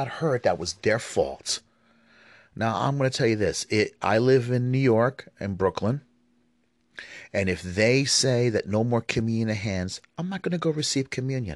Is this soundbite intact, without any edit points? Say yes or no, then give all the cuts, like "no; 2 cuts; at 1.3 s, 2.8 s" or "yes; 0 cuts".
yes; 0 cuts